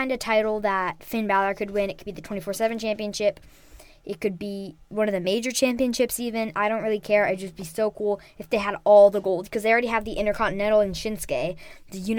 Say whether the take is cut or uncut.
uncut